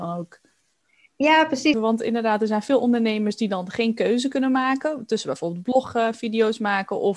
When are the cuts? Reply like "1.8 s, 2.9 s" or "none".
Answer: 1.7 s

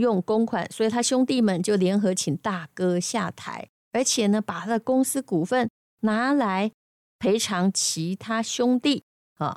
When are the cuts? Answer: none

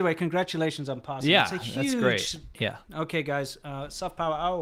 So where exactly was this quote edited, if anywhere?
2.5 s

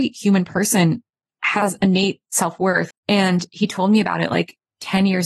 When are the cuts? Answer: 2.9 s

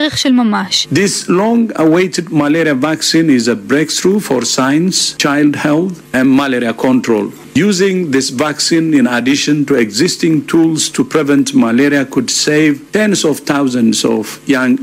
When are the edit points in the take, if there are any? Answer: none

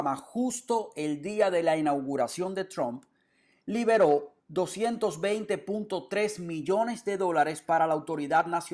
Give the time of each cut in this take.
4.4 s

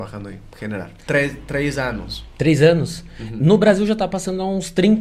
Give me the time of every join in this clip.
1.1 s

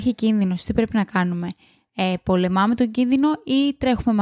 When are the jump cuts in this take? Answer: none

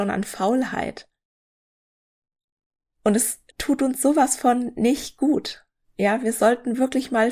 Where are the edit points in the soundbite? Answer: 3.5 s

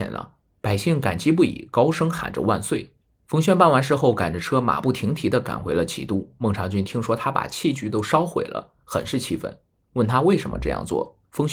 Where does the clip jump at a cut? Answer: none

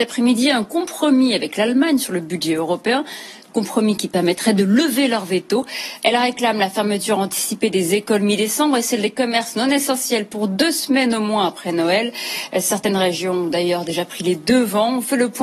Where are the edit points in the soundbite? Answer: 6.0 s

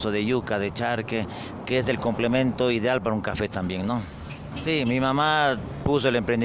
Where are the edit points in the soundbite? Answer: 4.5 s

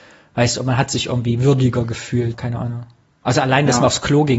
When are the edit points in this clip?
2.3 s

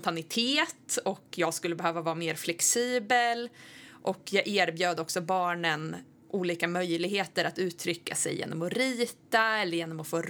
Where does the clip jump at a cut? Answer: none

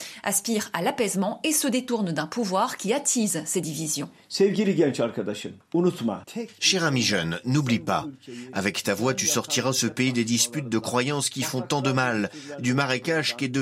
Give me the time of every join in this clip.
none

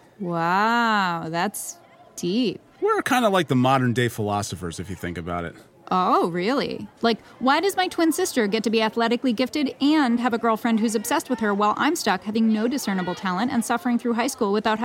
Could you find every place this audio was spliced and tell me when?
7.0 s

